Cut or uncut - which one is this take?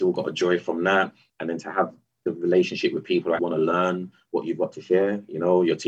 cut